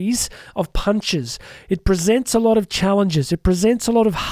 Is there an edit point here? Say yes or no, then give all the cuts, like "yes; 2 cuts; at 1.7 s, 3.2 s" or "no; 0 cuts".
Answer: no; 0 cuts